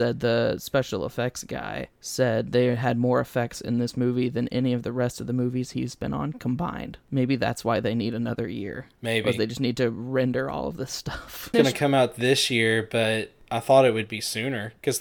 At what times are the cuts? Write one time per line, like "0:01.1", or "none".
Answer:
0:11.5